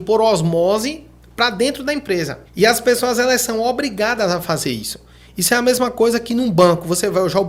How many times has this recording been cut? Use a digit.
1